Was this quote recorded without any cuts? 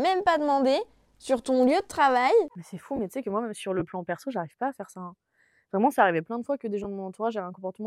no; 1 cut; at 2.5 s

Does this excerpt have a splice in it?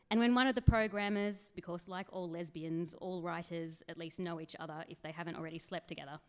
yes; 1 cut; at 1.5 s

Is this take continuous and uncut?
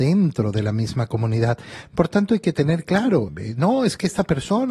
no; 1 cut; at 3.3 s

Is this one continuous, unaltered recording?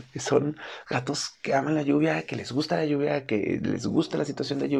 yes; 0 cuts

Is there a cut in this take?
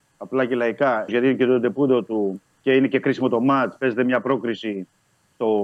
yes; 1 cut; at 1.1 s

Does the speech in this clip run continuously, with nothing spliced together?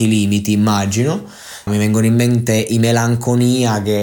no; 1 cut; at 1.7 s

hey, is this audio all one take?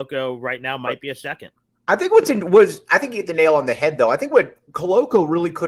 yes; 0 cuts

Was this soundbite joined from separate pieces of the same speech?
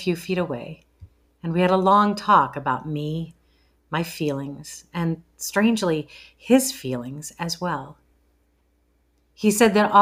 no; 0 cuts

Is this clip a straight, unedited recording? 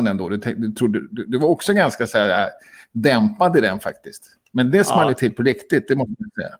yes; 0 cuts

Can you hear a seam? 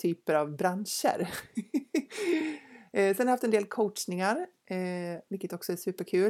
no; 0 cuts

